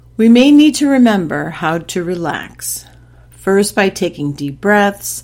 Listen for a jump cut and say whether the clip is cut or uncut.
uncut